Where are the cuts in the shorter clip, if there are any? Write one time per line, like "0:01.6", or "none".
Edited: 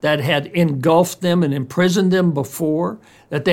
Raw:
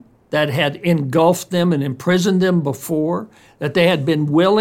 none